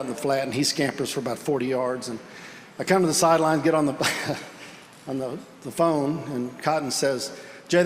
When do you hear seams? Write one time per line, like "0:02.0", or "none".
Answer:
none